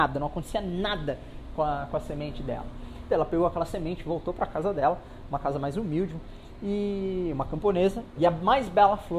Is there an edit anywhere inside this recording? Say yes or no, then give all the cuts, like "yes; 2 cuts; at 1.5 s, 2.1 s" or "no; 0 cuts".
yes; 2 cuts; at 3.1 s, 8.2 s